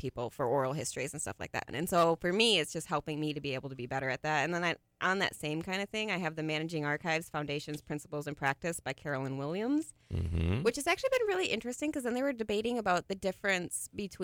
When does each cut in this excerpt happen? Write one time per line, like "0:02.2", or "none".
0:01.7